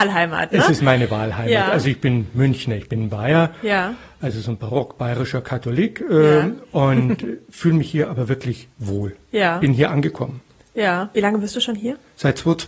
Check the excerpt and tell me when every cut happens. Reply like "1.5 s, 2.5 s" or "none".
none